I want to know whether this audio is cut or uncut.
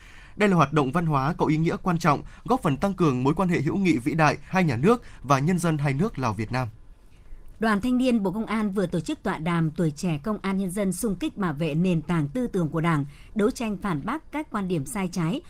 cut